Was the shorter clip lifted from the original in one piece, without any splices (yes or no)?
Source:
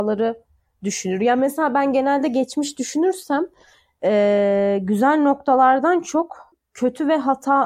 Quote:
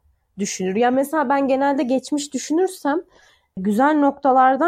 no